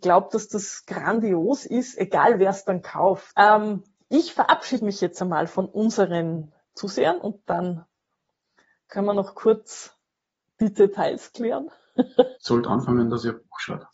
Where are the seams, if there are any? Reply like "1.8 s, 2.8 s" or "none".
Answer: 3.4 s, 12.4 s